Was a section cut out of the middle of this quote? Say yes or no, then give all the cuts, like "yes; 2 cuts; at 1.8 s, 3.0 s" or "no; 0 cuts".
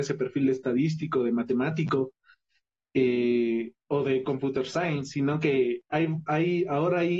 no; 0 cuts